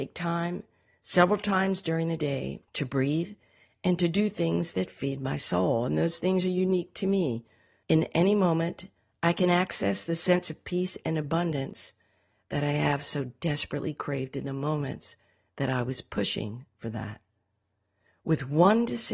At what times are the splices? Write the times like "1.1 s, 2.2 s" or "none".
2.7 s, 7.8 s